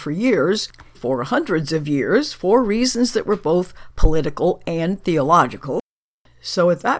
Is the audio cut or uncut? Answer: cut